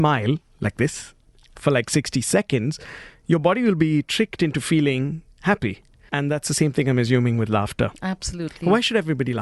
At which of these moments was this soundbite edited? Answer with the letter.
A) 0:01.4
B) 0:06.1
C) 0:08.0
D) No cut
B